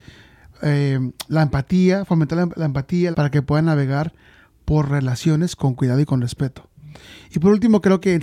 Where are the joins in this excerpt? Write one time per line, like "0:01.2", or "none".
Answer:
0:01.3
0:03.1